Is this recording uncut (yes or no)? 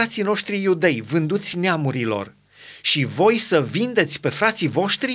yes